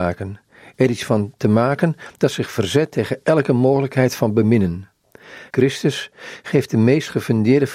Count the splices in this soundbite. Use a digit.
1